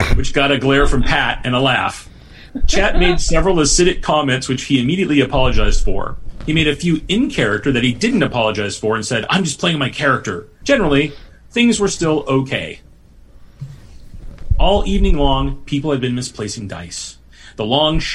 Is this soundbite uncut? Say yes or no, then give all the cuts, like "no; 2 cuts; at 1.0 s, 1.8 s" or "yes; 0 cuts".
no; 2 cuts; at 2.5 s, 10.6 s